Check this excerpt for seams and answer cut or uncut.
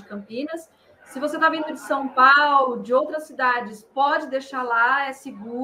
uncut